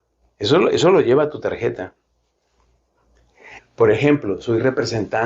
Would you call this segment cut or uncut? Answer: cut